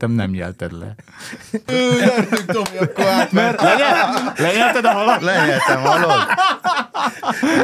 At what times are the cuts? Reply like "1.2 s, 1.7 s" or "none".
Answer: 1.7 s, 3.6 s

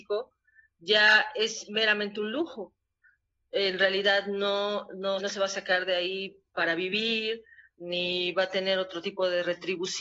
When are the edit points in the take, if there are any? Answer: 5.2 s

